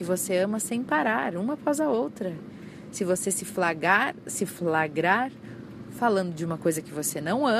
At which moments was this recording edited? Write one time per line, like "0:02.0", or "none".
none

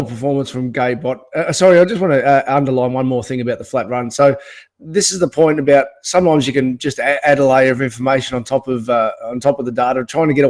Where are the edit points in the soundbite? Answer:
0:04.7

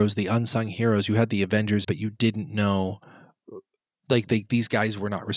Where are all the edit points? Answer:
0:01.8

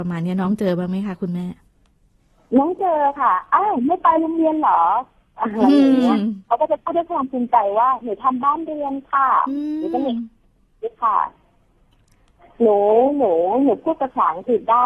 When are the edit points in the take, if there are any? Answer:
none

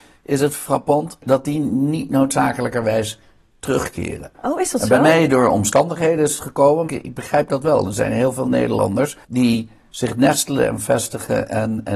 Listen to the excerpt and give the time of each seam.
0:06.9
0:09.2

